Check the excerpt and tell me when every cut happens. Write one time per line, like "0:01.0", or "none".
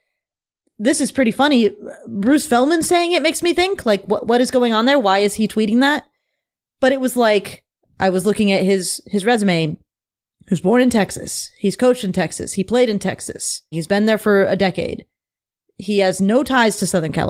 0:13.7